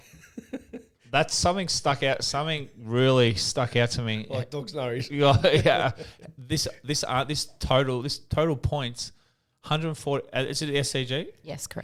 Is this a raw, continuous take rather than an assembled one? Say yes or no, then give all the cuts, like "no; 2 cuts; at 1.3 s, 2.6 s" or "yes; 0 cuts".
yes; 0 cuts